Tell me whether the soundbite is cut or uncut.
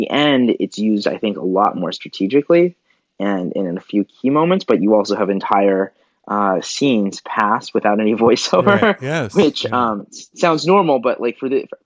uncut